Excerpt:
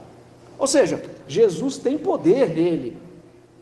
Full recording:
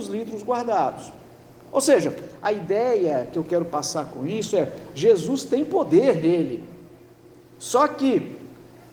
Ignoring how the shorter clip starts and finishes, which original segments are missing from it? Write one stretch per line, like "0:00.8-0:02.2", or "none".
0:02.4-0:04.9